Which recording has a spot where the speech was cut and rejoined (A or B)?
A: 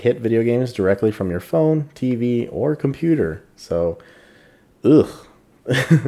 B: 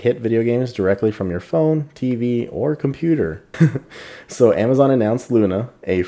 B